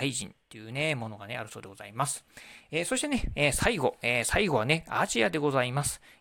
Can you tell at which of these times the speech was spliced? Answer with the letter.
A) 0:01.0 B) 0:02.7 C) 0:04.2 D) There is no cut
B